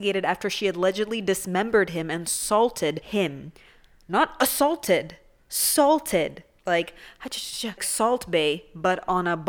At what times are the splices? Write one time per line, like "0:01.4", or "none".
0:06.6
0:07.8